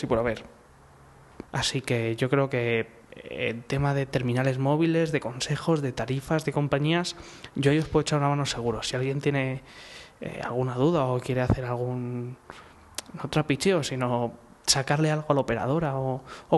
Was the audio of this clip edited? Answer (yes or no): yes